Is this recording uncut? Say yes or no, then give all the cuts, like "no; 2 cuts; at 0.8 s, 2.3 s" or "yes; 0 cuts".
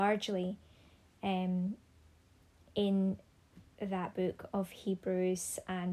yes; 0 cuts